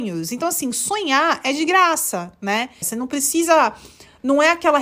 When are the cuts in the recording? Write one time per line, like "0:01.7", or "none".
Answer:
0:02.8